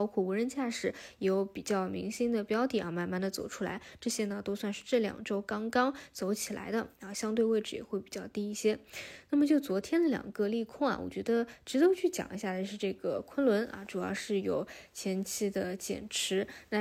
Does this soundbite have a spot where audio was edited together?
no; 0 cuts

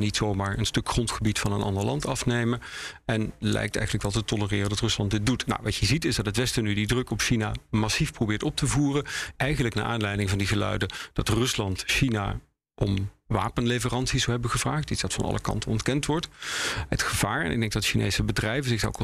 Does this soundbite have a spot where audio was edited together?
yes; 1 cut; at 9.3 s

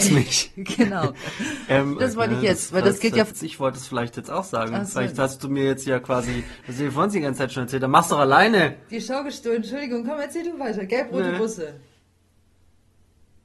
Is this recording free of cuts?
no; 1 cut; at 2.0 s

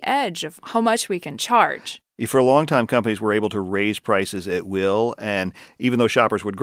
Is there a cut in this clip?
no; 0 cuts

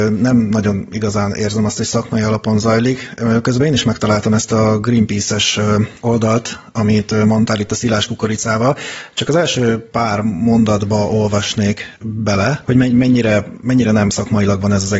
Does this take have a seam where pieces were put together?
no; 0 cuts

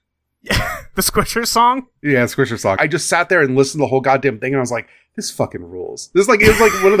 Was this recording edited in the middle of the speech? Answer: yes; 1 cut; at 2.8 s

